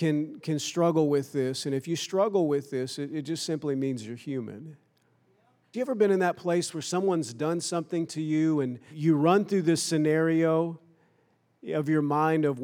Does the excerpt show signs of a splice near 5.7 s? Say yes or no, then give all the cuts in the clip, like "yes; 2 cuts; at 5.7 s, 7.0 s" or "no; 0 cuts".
yes; 2 cuts; at 5.7 s, 8.9 s